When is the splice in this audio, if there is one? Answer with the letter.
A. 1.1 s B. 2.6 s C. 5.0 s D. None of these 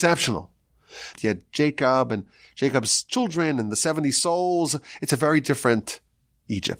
A